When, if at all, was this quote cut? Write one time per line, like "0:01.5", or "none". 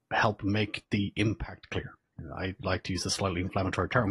none